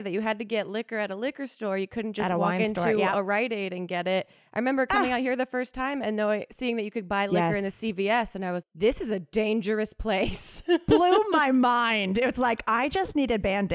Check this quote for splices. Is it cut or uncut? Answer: cut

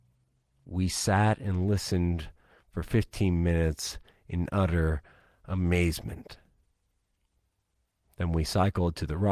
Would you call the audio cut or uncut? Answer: uncut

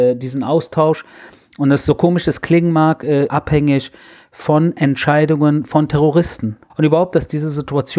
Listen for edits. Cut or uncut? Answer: cut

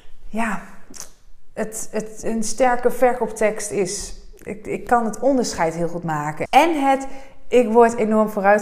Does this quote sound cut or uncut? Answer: cut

